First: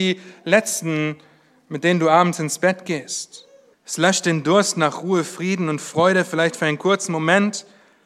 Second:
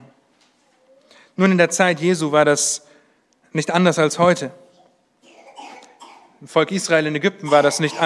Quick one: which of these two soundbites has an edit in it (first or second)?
first